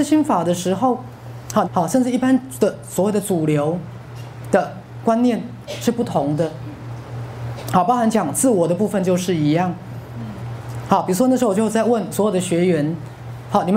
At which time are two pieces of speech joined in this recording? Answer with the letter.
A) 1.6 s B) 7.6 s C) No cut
A